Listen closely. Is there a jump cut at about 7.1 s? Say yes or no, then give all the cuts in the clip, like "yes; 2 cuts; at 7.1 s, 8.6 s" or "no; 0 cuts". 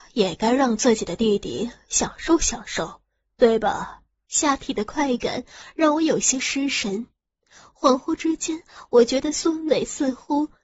no; 1 cut; at 4.3 s